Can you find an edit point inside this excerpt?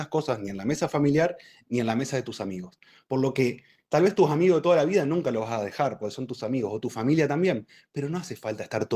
no; 0 cuts

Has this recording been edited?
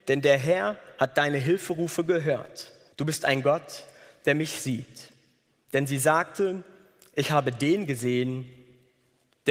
yes; 1 cut; at 2.9 s

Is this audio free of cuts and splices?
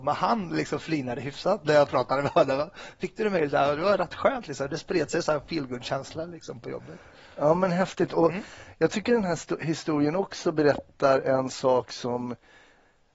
yes; 0 cuts

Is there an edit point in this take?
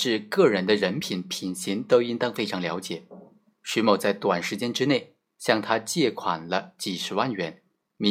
no; 0 cuts

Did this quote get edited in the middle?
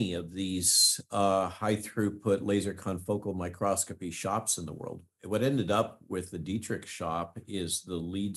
no; 0 cuts

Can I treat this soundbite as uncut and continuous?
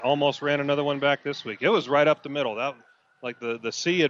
yes; 0 cuts

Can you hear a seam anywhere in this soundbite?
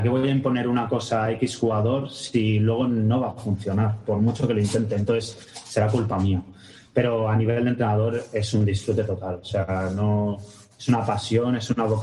no; 0 cuts

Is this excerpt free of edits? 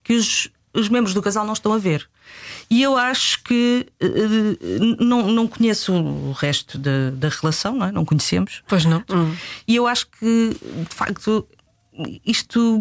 no; 1 cut; at 9.1 s

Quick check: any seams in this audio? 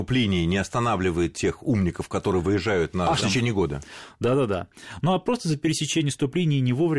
yes; 1 cut; at 3.2 s

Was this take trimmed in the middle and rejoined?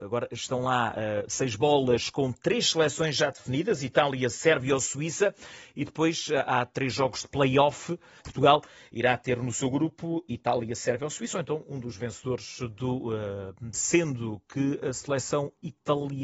yes; 2 cuts; at 8.2 s, 13.7 s

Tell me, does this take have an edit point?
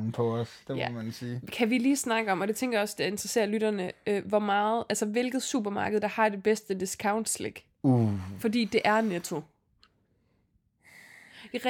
no; 0 cuts

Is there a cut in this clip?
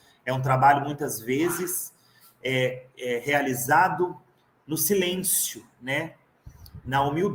no; 0 cuts

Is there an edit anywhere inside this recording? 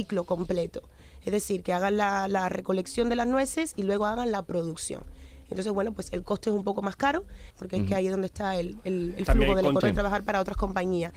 yes; 2 cuts; at 7.5 s, 9.8 s

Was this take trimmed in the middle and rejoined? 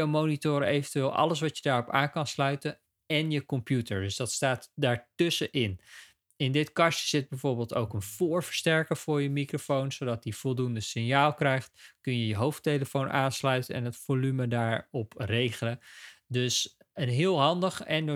no; 0 cuts

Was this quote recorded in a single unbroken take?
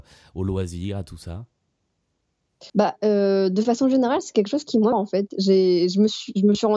no; 2 cuts; at 2.7 s, 4.9 s

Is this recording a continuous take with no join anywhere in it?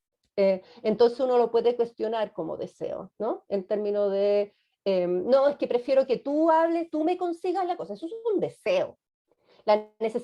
yes; 0 cuts

